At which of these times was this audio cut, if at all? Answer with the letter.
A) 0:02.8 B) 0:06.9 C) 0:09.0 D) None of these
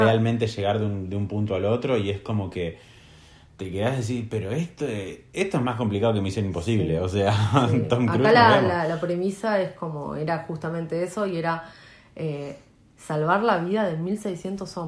D